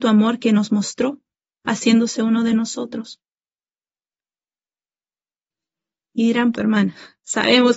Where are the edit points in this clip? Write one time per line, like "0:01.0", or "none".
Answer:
0:06.5

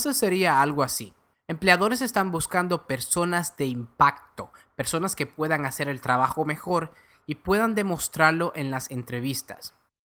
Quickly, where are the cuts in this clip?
0:01.3

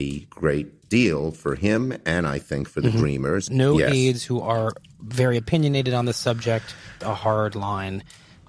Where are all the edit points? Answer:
0:03.5
0:07.0

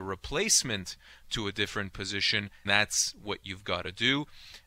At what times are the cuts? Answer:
0:02.7

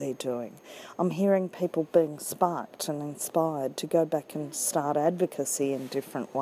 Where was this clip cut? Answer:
none

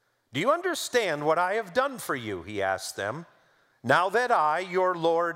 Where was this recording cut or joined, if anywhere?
0:03.7

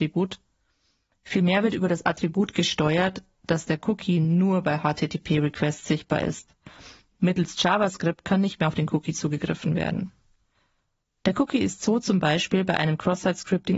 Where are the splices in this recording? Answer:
none

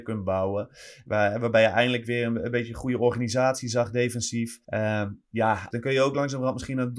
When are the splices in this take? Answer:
0:04.6
0:05.7

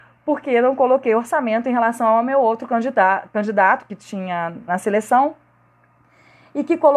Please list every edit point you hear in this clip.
0:04.7

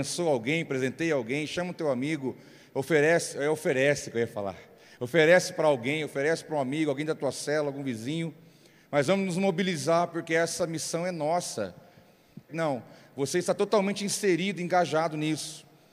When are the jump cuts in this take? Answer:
0:12.5

